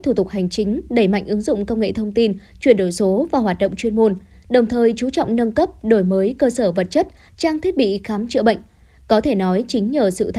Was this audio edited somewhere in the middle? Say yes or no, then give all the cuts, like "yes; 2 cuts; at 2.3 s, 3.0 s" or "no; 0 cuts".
no; 0 cuts